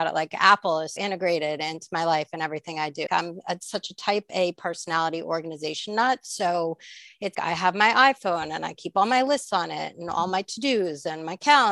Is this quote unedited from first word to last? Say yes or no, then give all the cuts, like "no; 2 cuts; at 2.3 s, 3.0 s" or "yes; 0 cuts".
no; 3 cuts; at 1.0 s, 3.1 s, 7.3 s